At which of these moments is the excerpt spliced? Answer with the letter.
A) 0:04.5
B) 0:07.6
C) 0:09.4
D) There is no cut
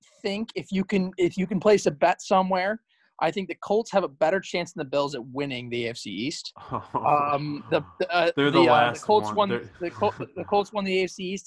D